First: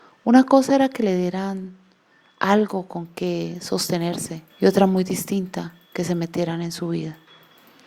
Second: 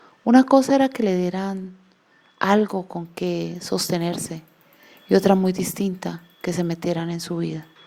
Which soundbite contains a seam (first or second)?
first